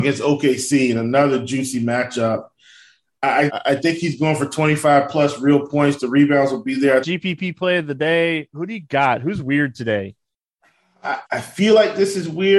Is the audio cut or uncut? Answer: cut